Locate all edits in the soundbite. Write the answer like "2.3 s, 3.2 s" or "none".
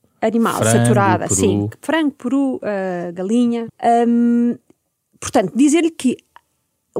3.7 s